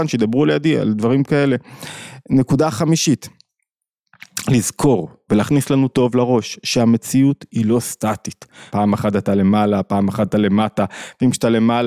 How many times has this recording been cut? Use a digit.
2